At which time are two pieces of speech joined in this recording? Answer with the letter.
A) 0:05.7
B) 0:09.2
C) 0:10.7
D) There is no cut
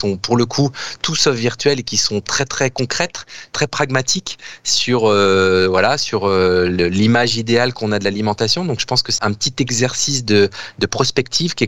B